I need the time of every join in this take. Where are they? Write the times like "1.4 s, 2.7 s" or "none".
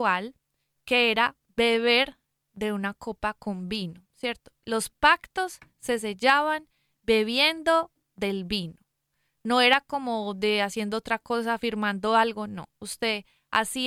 none